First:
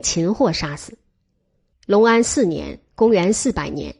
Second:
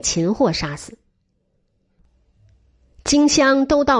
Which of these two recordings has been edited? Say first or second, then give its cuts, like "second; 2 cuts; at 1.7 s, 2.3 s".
first; 1 cut; at 1.7 s